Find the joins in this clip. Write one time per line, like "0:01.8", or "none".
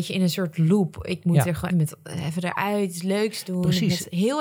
0:01.7